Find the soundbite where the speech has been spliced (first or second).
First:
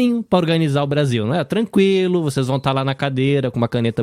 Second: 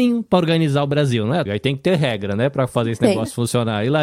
second